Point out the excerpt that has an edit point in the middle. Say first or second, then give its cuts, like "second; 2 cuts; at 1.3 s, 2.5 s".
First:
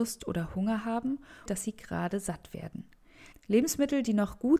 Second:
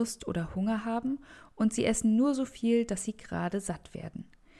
first; 2 cuts; at 1.5 s, 3.3 s